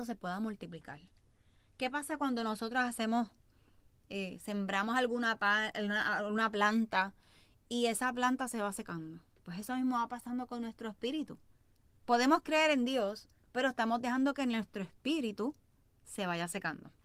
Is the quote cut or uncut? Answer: uncut